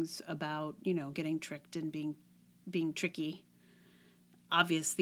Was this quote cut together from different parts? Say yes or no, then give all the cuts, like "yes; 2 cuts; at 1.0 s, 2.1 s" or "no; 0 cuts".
no; 0 cuts